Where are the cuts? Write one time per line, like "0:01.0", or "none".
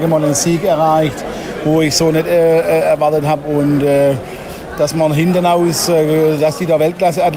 none